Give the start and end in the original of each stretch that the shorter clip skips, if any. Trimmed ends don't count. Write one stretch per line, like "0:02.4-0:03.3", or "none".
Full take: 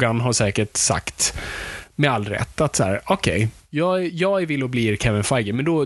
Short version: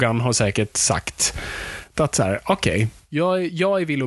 0:01.9-0:02.5